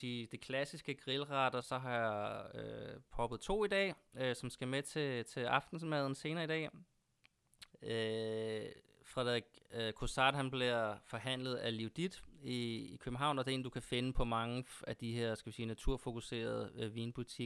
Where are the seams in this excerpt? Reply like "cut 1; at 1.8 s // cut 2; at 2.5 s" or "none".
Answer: cut 1; at 1.6 s // cut 2; at 7.7 s

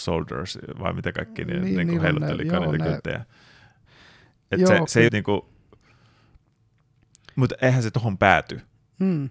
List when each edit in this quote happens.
cut 1; at 5.1 s

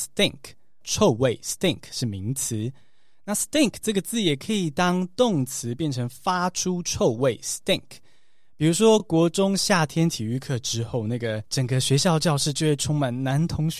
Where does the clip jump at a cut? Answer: none

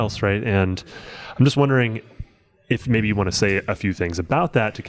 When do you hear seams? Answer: none

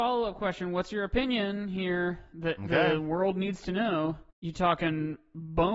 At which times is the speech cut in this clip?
cut 1; at 4.3 s

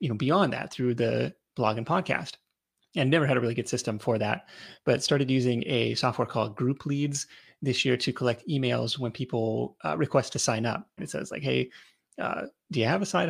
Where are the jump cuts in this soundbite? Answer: cut 1; at 11.0 s

